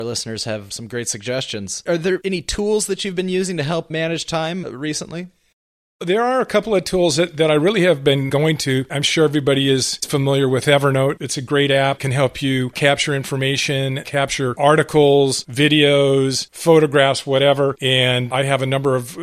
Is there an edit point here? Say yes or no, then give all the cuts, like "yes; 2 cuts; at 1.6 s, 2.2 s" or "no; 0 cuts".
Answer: no; 0 cuts